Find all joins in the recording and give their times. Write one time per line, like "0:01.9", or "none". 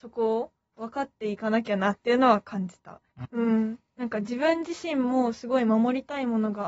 0:03.2